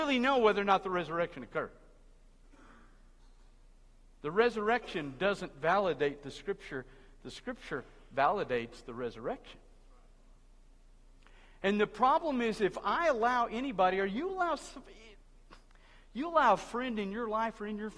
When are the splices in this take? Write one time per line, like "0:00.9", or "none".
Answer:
none